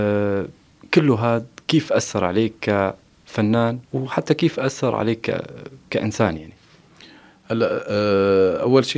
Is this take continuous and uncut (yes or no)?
no